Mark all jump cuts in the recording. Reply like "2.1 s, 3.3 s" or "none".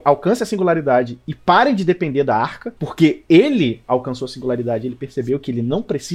2.8 s

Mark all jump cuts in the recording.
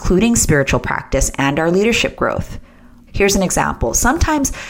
3.1 s

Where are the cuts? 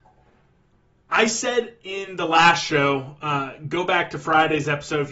none

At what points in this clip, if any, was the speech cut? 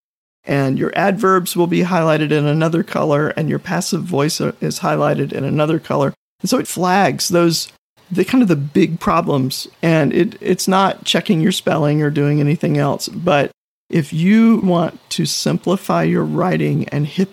6.6 s, 14.6 s

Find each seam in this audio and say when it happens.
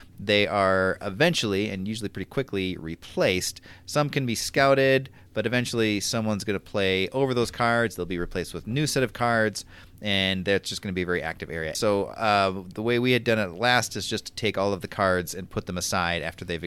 11.7 s

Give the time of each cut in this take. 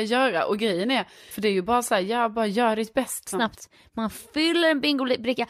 1.3 s, 3.3 s

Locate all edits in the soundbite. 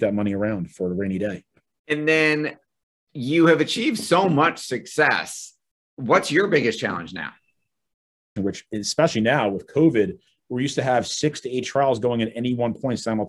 1.7 s, 8.4 s

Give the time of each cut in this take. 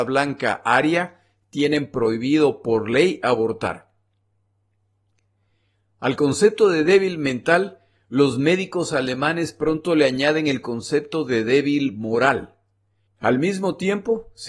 13.0 s

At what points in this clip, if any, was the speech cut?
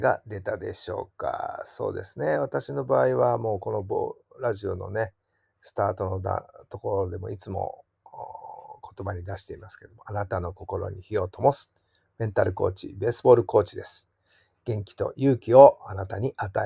none

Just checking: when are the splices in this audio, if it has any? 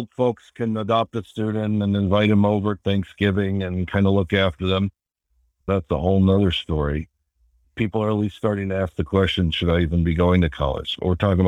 5.6 s

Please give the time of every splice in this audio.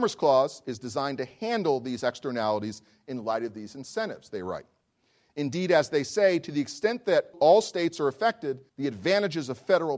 7.3 s, 8.7 s

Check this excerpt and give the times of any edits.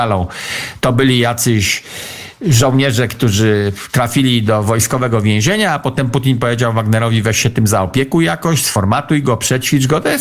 none

